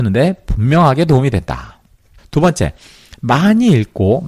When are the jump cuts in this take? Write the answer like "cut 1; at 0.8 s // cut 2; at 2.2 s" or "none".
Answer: cut 1; at 2.2 s